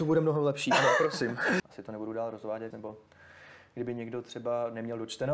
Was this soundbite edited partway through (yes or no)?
yes